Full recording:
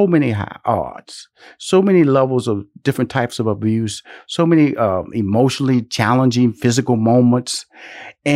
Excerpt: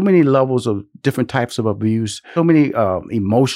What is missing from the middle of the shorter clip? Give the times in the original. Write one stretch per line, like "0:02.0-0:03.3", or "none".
0:04.2-0:04.4